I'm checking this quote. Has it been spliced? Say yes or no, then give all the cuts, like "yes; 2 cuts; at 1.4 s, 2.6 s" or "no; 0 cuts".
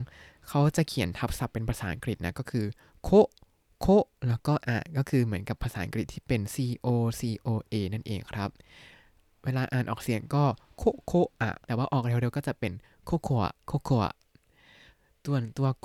yes; 2 cuts; at 11.6 s, 13.6 s